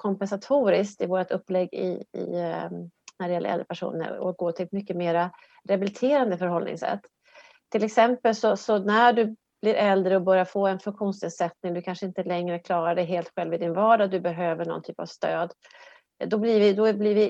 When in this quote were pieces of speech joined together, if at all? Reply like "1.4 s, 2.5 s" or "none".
none